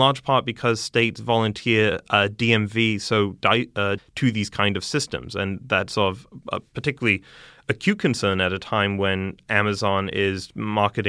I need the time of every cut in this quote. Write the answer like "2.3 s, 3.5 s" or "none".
4.0 s

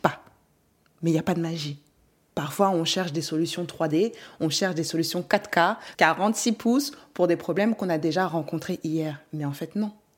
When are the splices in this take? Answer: 5.9 s

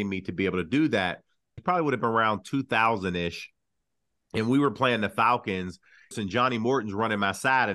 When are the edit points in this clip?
1.6 s, 6.1 s

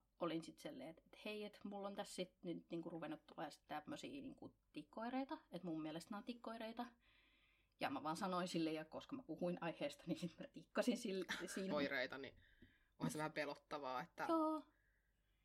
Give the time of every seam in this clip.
11.7 s

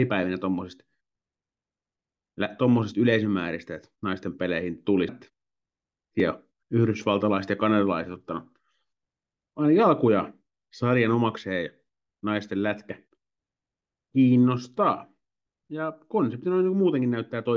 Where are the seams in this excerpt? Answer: 5.1 s

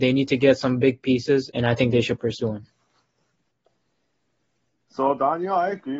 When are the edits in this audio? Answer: 1.5 s

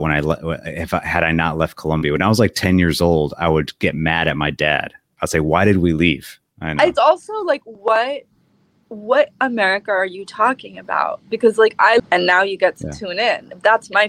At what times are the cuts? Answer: 6.5 s, 12.0 s

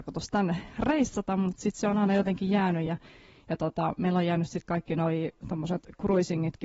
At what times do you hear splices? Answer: none

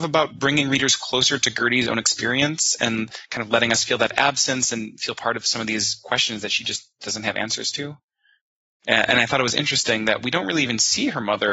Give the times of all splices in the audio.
8.8 s

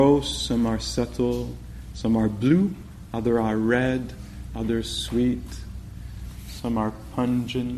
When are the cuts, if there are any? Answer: 4.5 s

